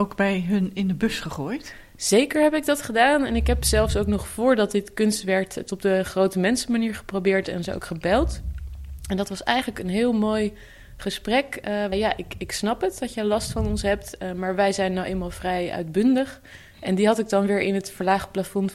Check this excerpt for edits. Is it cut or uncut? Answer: cut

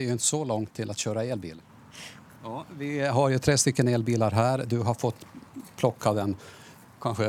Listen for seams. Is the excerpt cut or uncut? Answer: cut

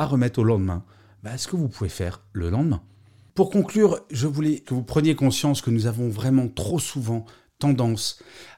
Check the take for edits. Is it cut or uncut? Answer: cut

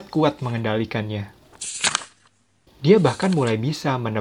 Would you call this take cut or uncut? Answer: cut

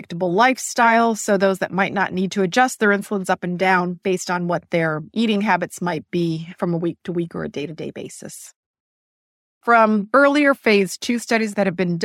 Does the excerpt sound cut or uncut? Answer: cut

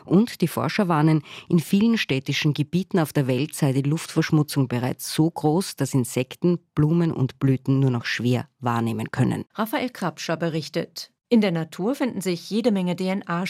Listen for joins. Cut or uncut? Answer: cut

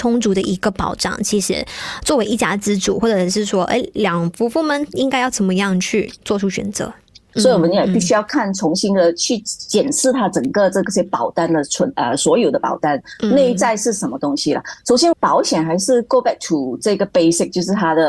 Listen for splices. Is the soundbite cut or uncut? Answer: cut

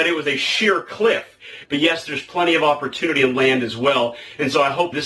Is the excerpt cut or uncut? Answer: cut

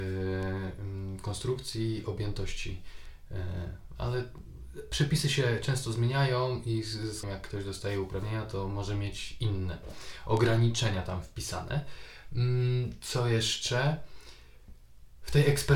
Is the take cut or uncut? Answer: cut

